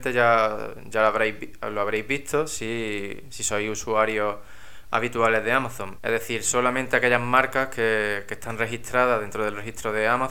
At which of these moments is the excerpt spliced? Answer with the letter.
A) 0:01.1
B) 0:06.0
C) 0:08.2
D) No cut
B